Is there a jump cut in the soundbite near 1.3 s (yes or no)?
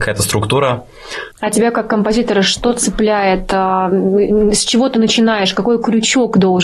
yes